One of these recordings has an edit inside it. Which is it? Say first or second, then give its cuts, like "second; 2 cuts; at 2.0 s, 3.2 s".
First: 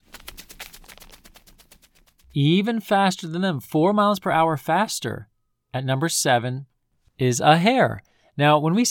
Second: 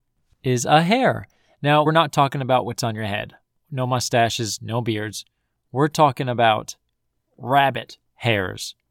second; 1 cut; at 1.9 s